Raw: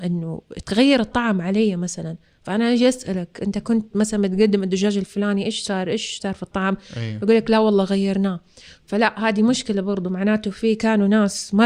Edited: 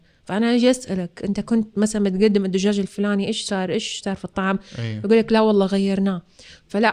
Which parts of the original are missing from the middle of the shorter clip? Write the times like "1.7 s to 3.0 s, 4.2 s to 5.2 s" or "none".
none

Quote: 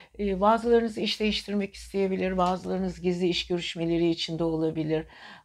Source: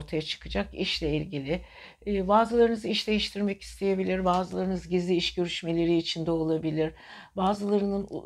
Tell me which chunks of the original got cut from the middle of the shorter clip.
none

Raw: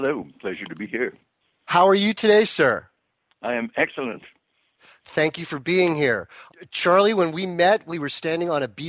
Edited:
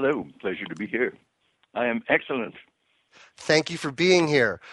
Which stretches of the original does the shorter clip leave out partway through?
1.5 s to 3.2 s

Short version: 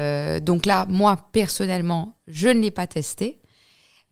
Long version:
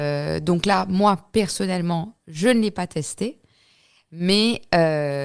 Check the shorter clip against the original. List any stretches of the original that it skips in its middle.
none

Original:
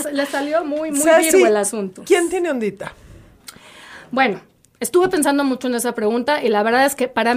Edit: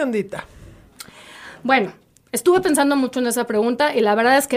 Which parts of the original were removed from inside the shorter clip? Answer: none

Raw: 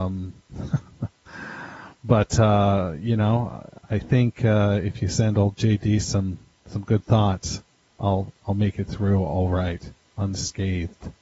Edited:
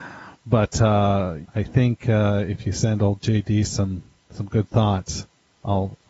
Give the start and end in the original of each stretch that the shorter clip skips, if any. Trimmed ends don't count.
3.0 s to 3.8 s

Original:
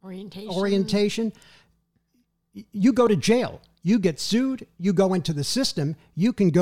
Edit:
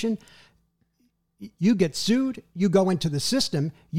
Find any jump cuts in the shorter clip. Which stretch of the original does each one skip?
2.7 s to 3.8 s

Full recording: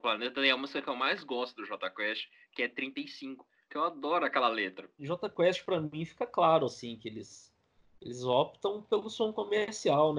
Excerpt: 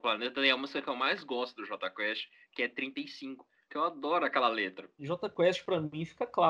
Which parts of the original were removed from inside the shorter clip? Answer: none

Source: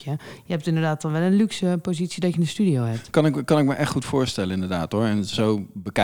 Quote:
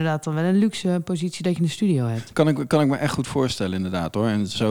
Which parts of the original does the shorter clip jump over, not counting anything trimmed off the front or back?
none

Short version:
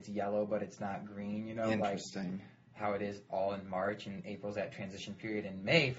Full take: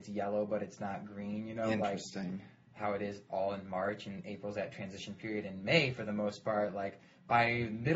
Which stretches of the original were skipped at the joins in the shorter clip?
none

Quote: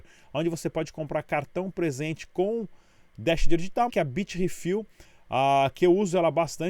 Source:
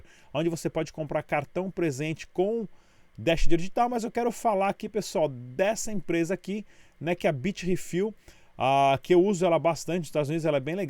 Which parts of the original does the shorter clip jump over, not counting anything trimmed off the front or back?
3.9 s to 7.2 s

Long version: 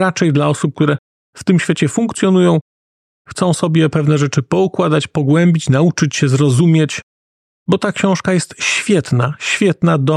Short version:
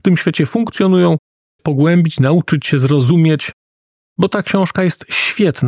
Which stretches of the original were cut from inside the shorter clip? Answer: 3.0 s to 5.1 s

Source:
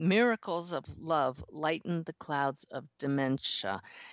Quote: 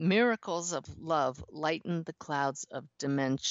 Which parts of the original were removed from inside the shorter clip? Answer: none

